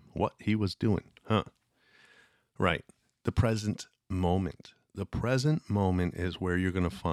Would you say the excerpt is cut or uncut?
uncut